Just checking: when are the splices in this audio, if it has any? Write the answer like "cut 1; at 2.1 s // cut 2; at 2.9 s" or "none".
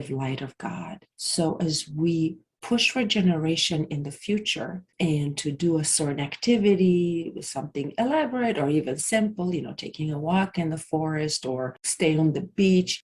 none